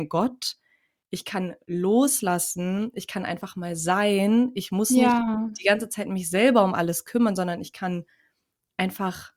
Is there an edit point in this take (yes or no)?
no